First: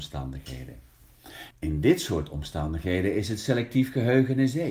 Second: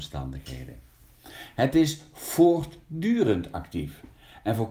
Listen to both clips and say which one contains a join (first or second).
first